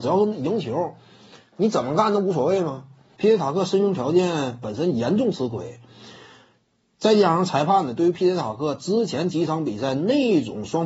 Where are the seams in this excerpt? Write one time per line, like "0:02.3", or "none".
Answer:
0:03.2